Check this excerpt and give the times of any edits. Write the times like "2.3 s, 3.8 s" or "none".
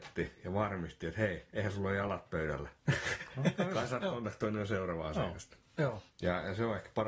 none